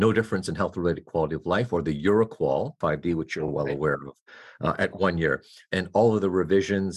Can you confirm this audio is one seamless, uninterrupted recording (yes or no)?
yes